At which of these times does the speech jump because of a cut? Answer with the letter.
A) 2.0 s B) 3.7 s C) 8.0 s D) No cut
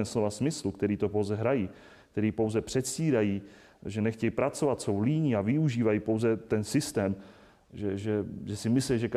D